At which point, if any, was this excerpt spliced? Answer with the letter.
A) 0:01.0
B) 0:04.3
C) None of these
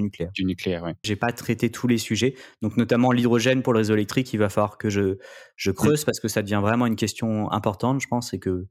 A